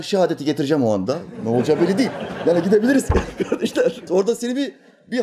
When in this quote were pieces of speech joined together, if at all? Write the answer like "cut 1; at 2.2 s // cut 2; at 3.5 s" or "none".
cut 1; at 4.1 s